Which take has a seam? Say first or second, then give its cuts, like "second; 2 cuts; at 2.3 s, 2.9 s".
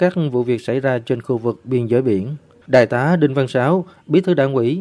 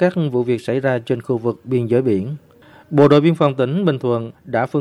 first; 1 cut; at 2.6 s